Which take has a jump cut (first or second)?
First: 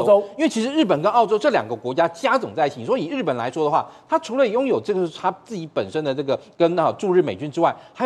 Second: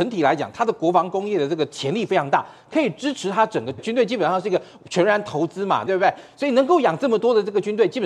second